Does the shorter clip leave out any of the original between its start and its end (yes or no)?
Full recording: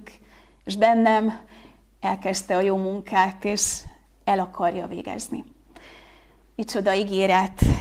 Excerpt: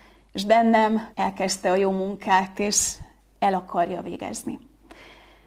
yes